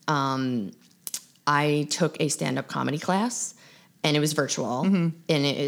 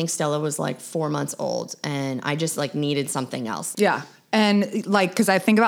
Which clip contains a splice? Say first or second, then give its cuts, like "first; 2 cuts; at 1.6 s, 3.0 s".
second; 1 cut; at 3.7 s